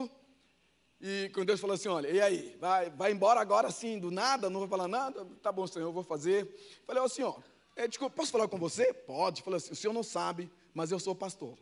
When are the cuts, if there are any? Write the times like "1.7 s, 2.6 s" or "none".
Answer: none